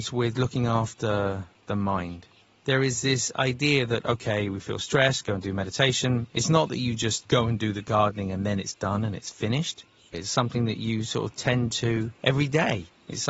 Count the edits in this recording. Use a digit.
2